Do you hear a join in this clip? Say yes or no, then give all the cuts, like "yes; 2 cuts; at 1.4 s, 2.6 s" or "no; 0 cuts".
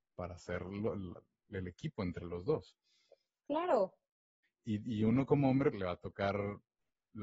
yes; 2 cuts; at 4.4 s, 5.7 s